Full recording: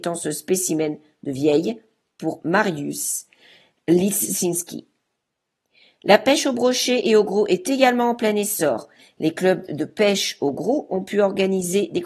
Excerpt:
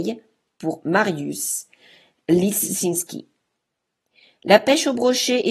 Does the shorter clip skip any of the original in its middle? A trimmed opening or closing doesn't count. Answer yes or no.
no